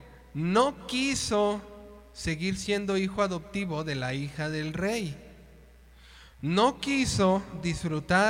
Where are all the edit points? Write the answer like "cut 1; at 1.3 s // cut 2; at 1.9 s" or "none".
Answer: none